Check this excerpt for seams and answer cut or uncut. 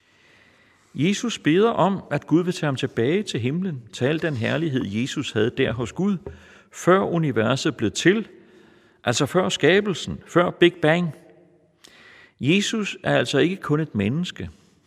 uncut